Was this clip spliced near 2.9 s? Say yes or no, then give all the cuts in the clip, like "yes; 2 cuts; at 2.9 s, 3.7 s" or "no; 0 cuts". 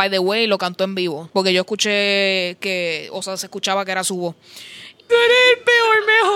no; 2 cuts; at 1.3 s, 5.1 s